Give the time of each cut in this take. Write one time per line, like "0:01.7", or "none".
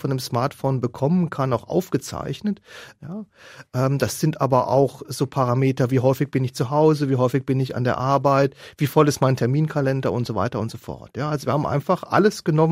0:03.0